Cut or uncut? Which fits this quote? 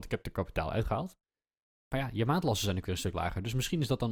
uncut